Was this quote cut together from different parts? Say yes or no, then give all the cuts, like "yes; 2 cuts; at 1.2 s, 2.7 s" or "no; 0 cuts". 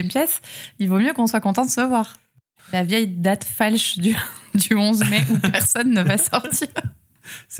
yes; 1 cut; at 2.6 s